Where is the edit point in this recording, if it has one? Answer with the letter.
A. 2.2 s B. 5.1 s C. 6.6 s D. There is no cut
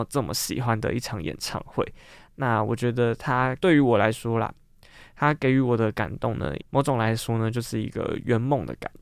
C